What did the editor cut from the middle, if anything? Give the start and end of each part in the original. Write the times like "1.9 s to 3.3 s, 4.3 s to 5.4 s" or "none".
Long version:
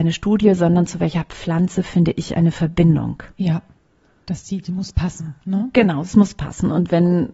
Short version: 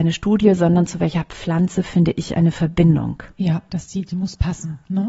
3.7 s to 4.2 s